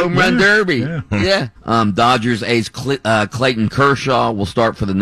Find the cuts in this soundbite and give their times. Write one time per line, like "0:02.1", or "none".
0:01.5